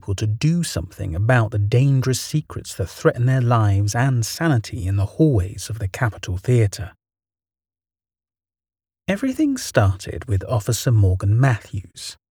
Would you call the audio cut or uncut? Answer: uncut